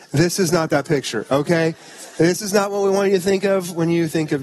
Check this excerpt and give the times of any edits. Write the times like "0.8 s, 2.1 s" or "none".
none